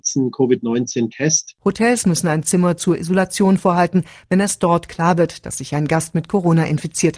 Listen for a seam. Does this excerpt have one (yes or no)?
no